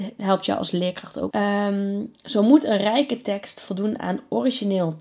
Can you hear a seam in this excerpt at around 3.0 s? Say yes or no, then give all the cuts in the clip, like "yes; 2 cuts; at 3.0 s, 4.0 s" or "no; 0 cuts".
no; 1 cut; at 1.3 s